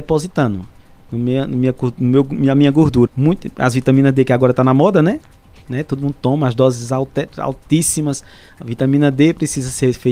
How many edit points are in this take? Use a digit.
1